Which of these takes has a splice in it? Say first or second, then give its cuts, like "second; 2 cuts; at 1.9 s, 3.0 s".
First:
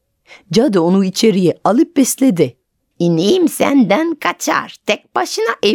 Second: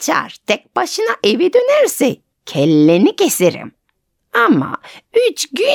first; 1 cut; at 2.9 s